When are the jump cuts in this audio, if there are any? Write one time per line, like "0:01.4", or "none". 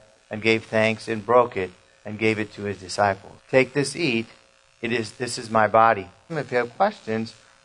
0:03.4
0:06.3